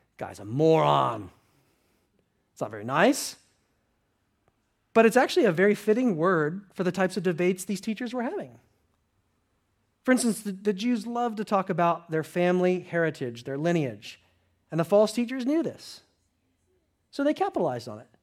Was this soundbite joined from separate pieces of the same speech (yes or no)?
no